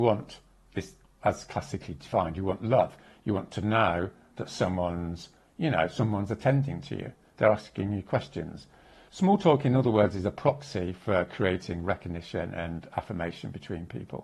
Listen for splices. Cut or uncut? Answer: uncut